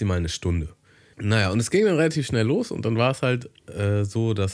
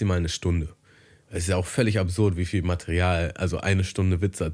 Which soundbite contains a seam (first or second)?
first